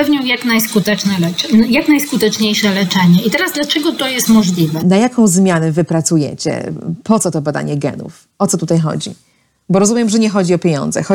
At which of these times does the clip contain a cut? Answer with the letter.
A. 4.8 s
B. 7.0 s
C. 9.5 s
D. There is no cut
A